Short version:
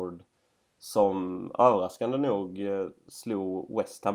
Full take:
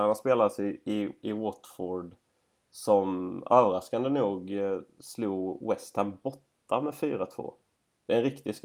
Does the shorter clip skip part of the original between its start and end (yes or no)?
no